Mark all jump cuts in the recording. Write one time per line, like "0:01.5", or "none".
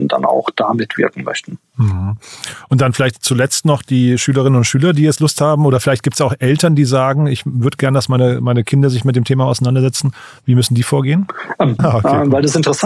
0:11.8